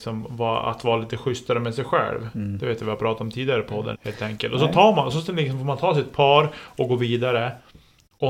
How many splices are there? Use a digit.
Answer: 1